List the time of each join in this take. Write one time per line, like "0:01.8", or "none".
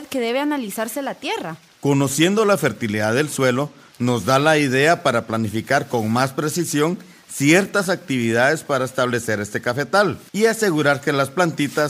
0:01.7
0:10.3